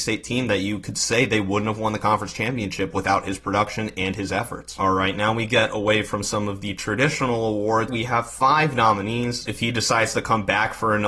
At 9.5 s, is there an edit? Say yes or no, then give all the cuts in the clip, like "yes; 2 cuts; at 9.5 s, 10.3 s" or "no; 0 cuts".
yes; 2 cuts; at 7.9 s, 9.5 s